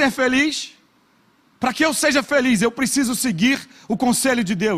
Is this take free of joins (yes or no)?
yes